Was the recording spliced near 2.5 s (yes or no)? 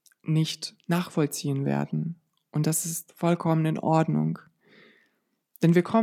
no